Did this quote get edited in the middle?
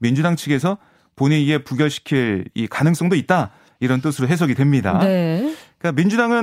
no; 0 cuts

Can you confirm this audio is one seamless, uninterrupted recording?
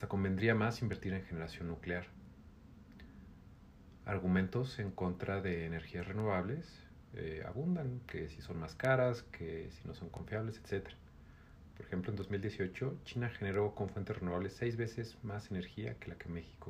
no; 1 cut; at 11.7 s

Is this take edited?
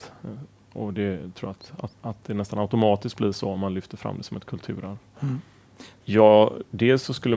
yes; 2 cuts; at 1.9 s, 6.0 s

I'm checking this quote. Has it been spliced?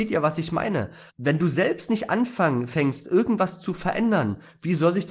yes; 1 cut; at 1.1 s

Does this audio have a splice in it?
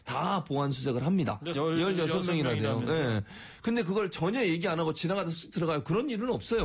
yes; 1 cut; at 1.5 s

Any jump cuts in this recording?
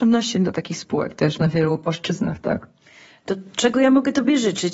no; 0 cuts

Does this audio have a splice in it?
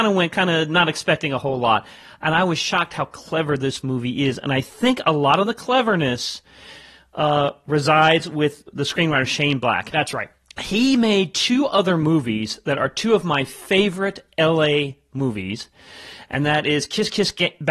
no; 0 cuts

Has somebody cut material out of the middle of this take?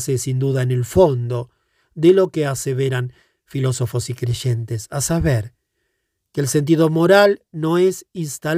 no; 0 cuts

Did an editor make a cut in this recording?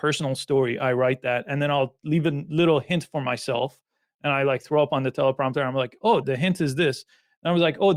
yes; 1 cut; at 6.2 s

